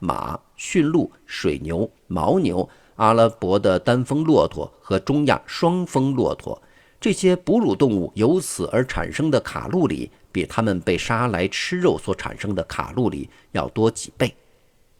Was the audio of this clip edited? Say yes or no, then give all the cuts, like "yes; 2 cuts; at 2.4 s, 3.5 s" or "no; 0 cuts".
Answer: no; 0 cuts